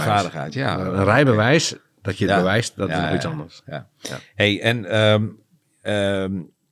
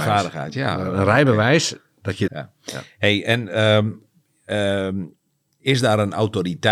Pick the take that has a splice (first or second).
second